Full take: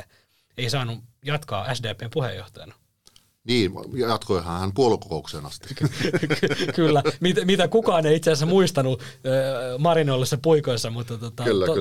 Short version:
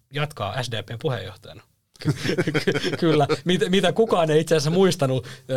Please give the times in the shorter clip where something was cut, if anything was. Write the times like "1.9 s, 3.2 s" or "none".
2.0 s